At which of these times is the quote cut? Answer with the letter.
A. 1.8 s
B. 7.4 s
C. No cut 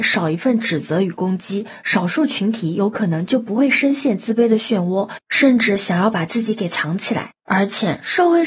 C